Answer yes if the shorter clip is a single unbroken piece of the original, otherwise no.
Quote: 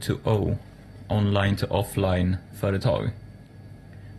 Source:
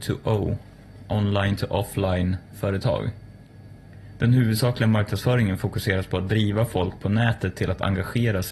yes